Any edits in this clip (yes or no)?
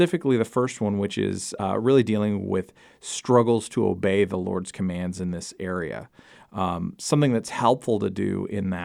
no